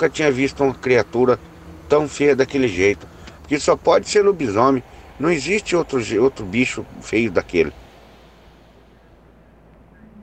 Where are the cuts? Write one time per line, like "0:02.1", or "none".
0:03.4